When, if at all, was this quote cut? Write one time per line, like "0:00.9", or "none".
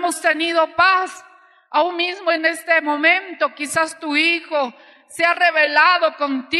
none